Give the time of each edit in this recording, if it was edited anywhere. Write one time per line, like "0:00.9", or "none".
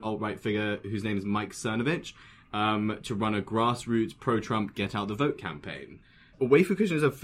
0:06.3